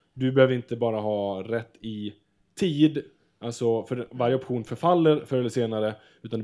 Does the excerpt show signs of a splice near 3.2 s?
no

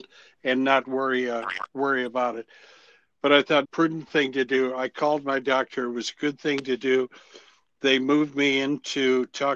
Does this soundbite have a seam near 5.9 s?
no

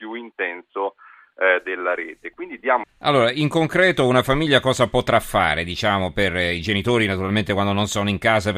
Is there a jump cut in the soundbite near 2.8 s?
yes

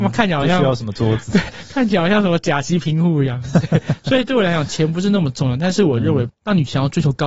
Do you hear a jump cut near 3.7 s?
no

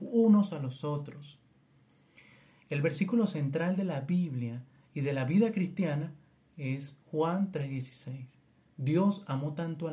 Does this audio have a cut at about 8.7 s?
yes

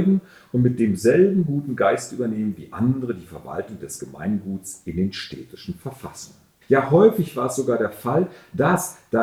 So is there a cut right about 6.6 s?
yes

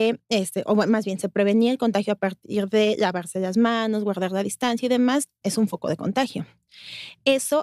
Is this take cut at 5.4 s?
yes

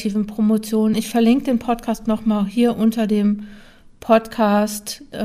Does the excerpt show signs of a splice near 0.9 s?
yes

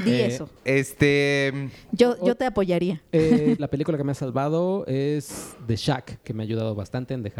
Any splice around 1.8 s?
no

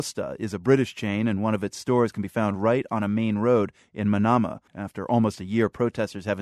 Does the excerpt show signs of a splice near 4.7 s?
yes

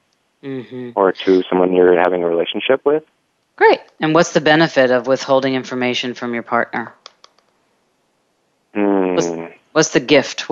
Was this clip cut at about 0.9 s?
no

